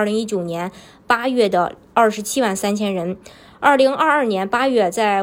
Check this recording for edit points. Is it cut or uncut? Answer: uncut